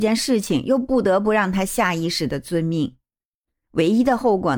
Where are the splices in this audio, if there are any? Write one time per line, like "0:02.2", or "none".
0:03.7